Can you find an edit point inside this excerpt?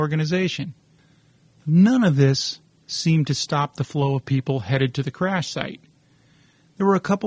yes; 1 cut; at 2.8 s

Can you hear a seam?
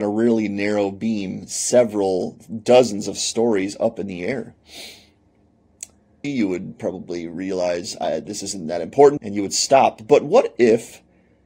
yes; 2 cuts; at 6.2 s, 9.2 s

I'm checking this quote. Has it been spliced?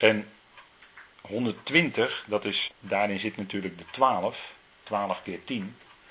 yes; 1 cut; at 2.7 s

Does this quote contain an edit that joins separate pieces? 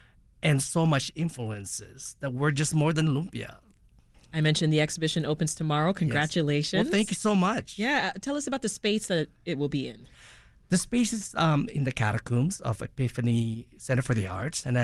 yes; 1 cut; at 4.1 s

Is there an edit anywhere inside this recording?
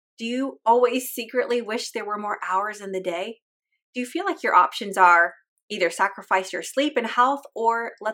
no; 0 cuts

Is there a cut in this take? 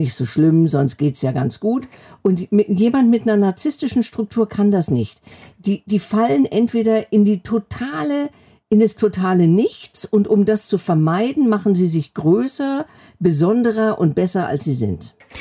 no; 0 cuts

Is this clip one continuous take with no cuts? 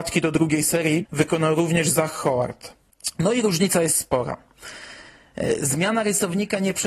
no; 1 cut; at 1.0 s

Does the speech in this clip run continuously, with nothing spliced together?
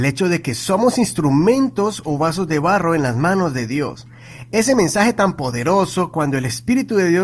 yes; 0 cuts

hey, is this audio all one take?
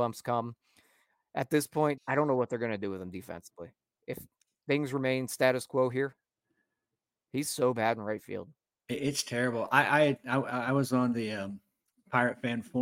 no; 1 cut; at 2.0 s

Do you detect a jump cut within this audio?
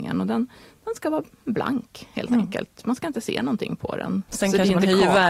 yes; 1 cut; at 4.3 s

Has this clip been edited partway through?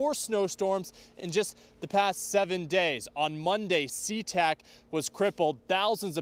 no; 0 cuts

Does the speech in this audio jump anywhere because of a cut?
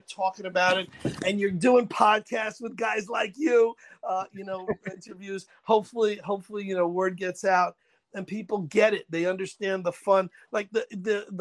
no; 0 cuts

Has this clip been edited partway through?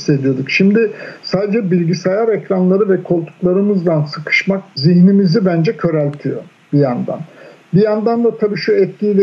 no; 0 cuts

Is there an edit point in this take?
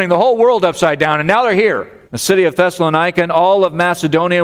yes; 1 cut; at 2.0 s

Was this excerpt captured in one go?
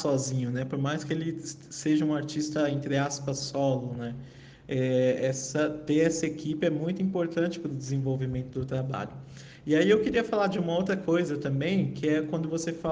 yes; 0 cuts

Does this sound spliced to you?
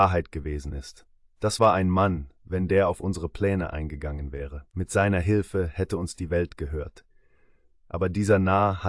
yes; 1 cut; at 4.7 s

